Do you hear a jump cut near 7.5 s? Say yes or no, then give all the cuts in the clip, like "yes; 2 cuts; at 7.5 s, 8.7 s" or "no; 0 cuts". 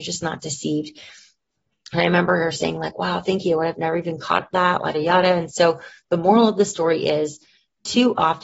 no; 1 cut; at 4.9 s